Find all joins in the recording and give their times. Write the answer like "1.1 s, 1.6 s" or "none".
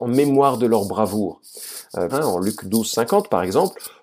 2.1 s